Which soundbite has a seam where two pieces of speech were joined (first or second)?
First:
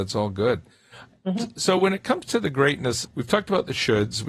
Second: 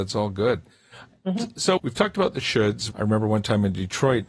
second